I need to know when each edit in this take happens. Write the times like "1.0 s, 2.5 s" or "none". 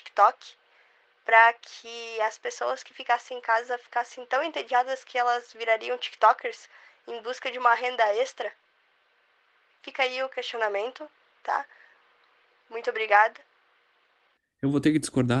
none